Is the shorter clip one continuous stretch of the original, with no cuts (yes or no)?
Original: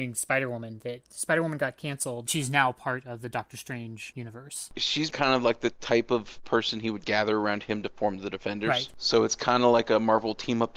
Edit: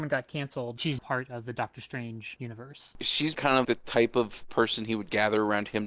no